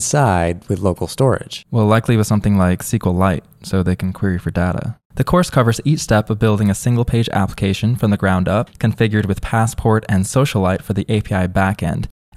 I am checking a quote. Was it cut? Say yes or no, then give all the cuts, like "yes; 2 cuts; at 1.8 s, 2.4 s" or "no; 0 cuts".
yes; 1 cut; at 5.0 s